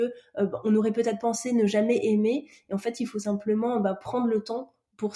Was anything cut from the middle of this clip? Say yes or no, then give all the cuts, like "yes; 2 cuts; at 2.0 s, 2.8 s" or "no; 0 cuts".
no; 0 cuts